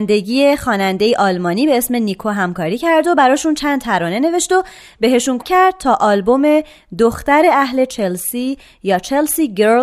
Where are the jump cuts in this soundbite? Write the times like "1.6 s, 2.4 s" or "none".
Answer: 5.4 s